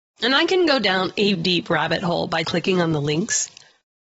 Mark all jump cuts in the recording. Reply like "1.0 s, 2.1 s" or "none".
1.3 s, 2.4 s